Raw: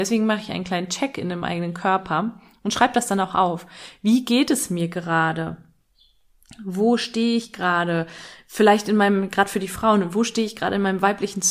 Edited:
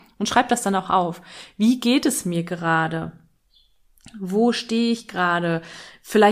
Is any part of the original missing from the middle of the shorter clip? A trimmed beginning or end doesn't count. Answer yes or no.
no